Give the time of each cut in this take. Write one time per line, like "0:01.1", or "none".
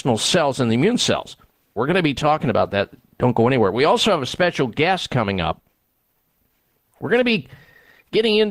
0:01.8